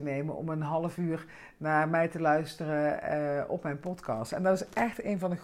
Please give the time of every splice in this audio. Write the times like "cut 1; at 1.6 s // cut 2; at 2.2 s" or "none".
none